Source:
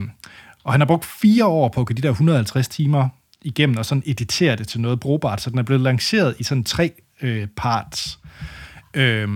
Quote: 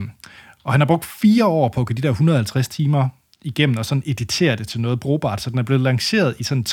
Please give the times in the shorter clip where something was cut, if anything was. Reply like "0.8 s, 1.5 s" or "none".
none

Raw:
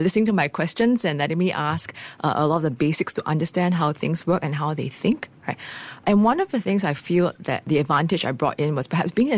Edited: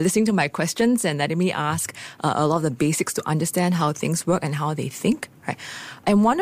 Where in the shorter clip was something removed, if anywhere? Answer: none

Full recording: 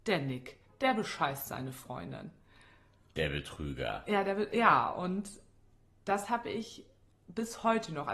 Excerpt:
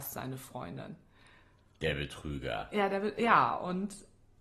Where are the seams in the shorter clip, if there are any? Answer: none

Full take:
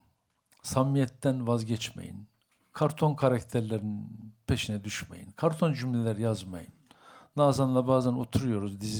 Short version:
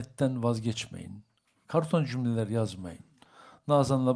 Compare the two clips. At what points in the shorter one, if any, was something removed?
1.6 s

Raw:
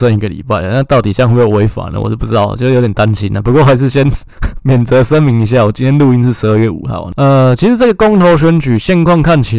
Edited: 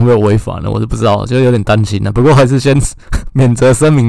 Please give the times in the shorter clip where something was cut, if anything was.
none

